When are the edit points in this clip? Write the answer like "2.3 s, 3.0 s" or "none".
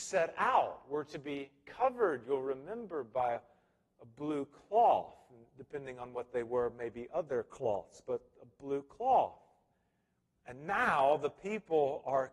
none